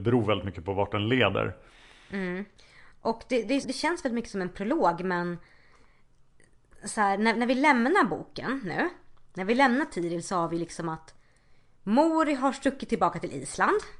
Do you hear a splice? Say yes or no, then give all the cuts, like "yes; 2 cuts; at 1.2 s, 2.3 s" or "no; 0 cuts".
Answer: yes; 1 cut; at 3.6 s